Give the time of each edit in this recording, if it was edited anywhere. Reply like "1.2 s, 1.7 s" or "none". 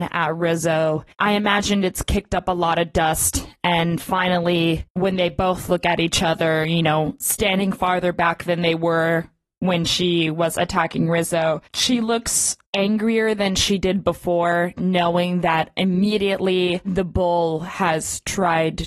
none